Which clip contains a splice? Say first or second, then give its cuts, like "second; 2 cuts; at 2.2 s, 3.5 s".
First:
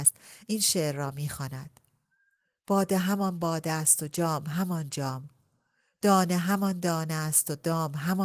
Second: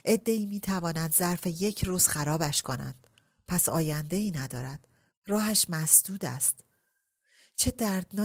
second; 1 cut; at 5.1 s